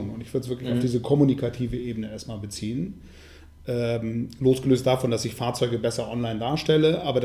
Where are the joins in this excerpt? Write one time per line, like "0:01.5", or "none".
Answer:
none